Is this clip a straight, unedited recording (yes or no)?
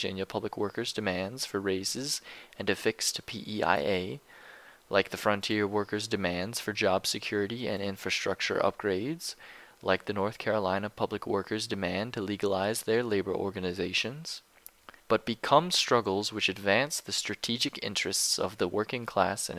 no